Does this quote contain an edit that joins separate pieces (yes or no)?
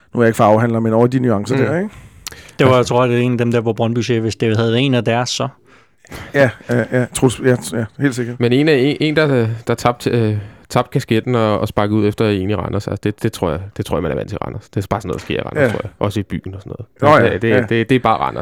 no